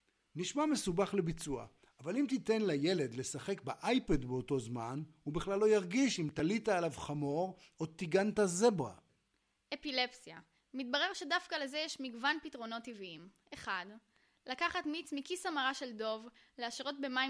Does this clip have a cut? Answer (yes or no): no